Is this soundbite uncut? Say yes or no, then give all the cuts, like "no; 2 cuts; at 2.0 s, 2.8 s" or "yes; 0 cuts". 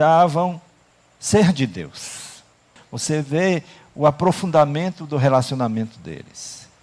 no; 1 cut; at 2.8 s